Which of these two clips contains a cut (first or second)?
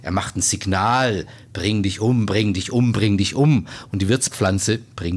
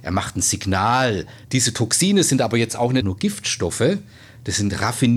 second